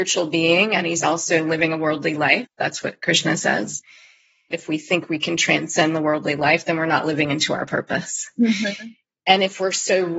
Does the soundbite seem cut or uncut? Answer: cut